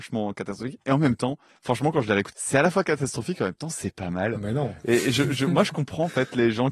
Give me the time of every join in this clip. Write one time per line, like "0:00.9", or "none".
0:02.3